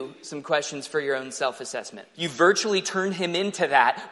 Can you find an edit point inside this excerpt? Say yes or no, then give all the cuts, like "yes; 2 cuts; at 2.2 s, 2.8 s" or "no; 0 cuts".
yes; 1 cut; at 2.1 s